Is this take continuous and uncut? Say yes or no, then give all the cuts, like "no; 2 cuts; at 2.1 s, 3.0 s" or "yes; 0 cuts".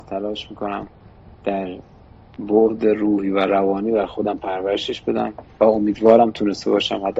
yes; 0 cuts